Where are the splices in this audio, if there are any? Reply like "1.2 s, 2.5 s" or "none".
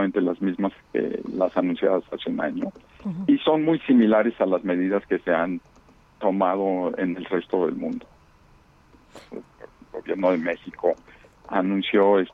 9.3 s